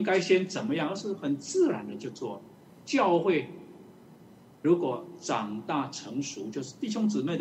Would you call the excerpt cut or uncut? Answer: uncut